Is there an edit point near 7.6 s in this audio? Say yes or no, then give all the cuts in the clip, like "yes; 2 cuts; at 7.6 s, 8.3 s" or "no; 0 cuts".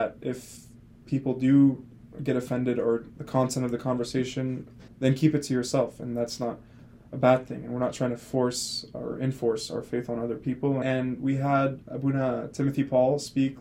no; 3 cuts; at 3.1 s, 4.9 s, 10.8 s